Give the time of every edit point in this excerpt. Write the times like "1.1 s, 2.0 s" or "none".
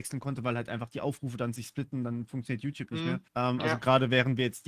3.3 s